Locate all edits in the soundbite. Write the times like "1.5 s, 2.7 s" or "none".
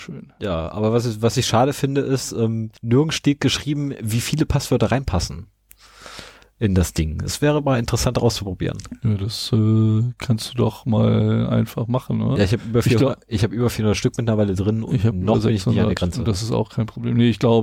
2.8 s